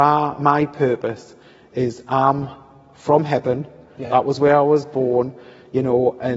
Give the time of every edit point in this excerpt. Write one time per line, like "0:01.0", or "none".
none